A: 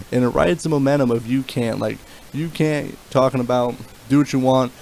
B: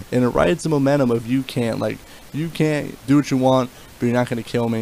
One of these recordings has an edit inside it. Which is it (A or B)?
B